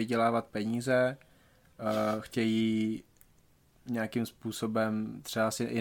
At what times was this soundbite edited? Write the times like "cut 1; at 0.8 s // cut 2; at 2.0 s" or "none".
none